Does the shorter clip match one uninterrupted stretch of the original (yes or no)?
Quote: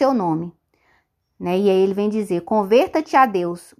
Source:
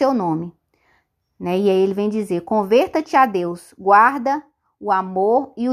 yes